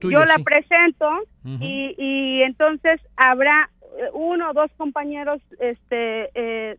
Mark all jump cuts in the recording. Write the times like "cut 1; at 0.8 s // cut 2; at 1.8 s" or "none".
none